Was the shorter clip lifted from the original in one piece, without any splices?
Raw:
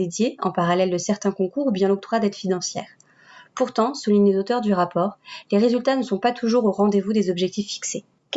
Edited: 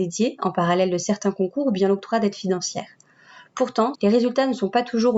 no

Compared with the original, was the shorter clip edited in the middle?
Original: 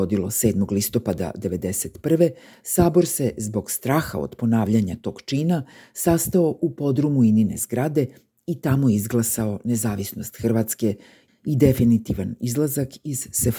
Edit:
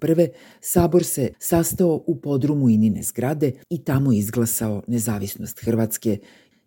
yes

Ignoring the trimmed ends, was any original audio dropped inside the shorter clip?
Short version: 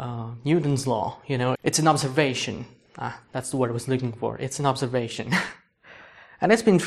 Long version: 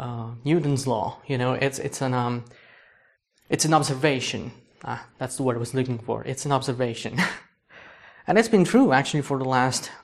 yes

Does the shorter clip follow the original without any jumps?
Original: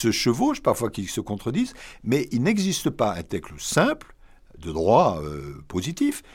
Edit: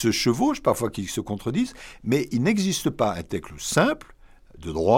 yes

